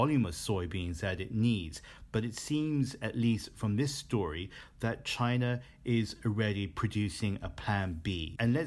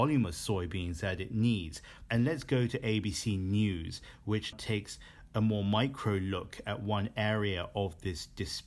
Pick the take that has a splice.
second; 2 cuts; at 2.1 s, 4.5 s

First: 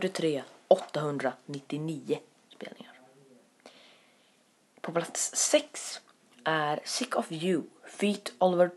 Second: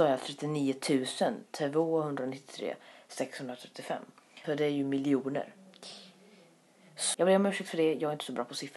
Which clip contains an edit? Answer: second; 2 cuts; at 4.4 s, 7.1 s

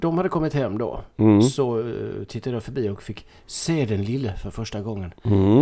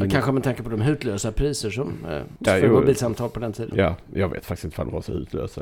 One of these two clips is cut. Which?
second; 1 cut; at 2.5 s

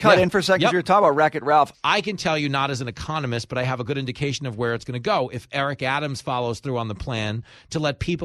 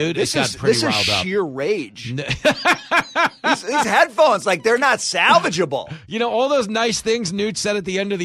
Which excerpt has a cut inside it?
first; 1 cut; at 1.7 s

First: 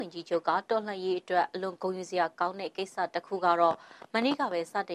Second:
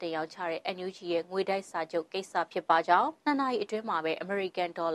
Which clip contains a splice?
second; 1 cut; at 3.2 s

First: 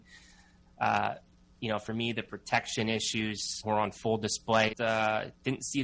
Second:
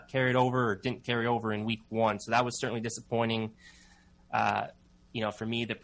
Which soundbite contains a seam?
first; 2 cuts; at 3.6 s, 4.7 s

